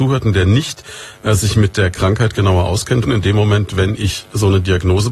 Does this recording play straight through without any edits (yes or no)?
no